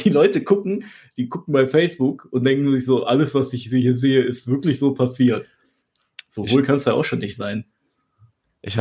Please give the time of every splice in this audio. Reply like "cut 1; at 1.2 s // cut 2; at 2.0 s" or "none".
none